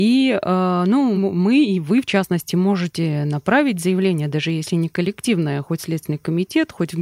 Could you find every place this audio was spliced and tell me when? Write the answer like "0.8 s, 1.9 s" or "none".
1.2 s